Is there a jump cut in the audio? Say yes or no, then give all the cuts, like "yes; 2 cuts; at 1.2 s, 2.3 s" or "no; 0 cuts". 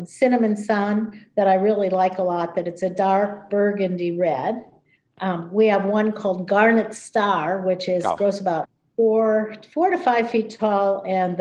no; 0 cuts